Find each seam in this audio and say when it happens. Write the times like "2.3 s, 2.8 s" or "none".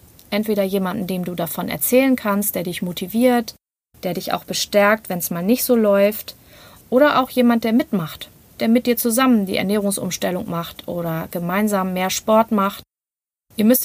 none